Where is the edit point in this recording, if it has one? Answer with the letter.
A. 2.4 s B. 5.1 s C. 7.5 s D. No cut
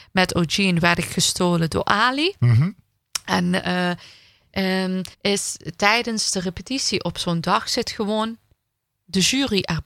B